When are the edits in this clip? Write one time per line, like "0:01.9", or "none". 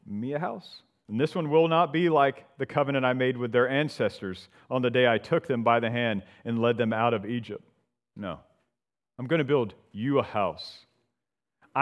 0:01.1
0:08.1